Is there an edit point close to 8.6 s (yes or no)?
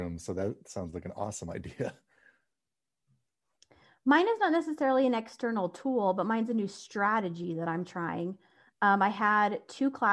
no